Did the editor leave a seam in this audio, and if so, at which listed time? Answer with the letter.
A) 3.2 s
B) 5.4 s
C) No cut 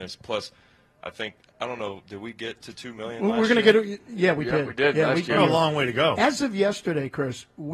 B